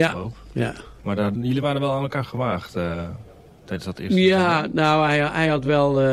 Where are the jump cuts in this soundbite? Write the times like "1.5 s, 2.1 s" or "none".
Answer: 1.3 s